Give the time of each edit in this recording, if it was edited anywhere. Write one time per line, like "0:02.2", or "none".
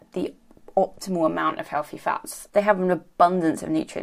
0:02.5